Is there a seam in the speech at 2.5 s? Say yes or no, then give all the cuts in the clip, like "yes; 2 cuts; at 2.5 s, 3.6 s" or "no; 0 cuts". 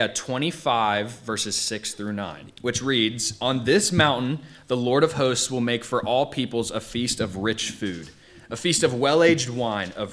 yes; 1 cut; at 2.5 s